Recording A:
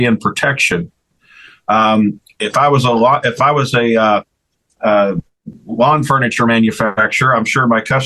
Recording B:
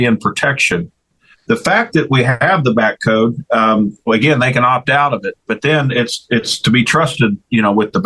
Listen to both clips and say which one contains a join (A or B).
B